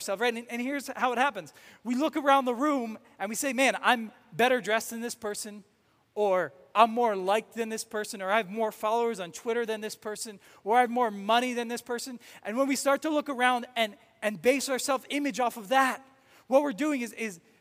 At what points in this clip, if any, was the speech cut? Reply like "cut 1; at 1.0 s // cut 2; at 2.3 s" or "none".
none